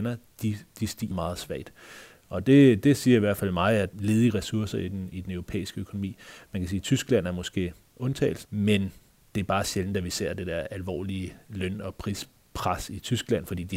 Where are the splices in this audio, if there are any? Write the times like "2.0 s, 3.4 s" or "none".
1.1 s, 3.9 s, 8.4 s